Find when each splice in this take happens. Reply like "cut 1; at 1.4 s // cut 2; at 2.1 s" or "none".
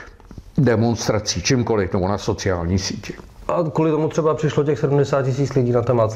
none

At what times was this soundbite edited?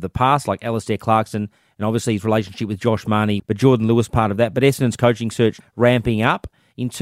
cut 1; at 3.4 s // cut 2; at 5.6 s

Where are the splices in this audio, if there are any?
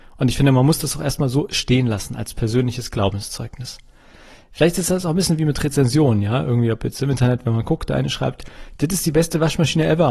none

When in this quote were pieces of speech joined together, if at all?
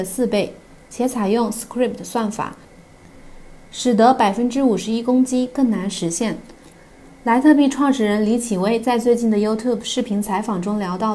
none

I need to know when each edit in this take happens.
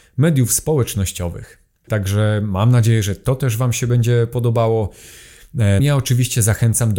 cut 1; at 1.9 s // cut 2; at 5.8 s

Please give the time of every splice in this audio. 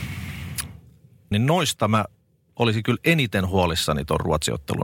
cut 1; at 1.3 s

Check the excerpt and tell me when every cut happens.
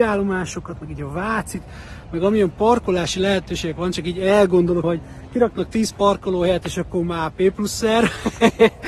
cut 1; at 4.8 s

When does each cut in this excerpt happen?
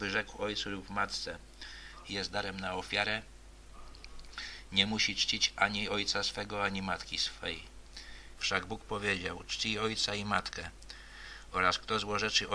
cut 1; at 2.0 s // cut 2; at 8.4 s

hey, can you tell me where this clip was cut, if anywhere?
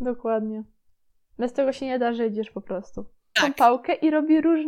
cut 1; at 3.4 s

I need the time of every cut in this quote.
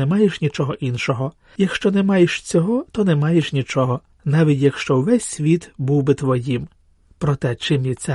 none

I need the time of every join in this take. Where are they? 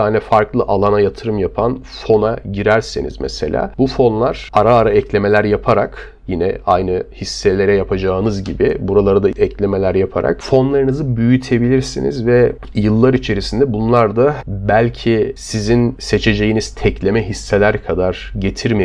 none

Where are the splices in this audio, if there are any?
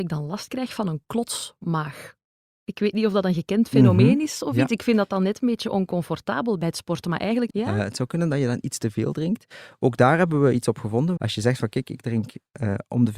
cut 1; at 7.5 s // cut 2; at 11.2 s

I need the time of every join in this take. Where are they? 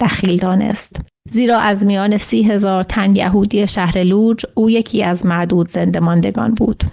none

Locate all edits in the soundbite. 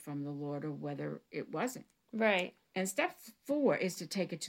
cut 1; at 2.6 s

